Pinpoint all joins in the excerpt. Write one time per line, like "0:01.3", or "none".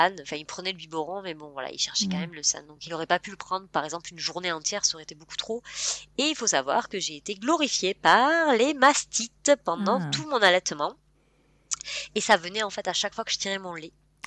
none